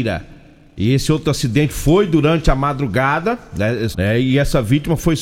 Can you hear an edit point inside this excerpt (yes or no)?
yes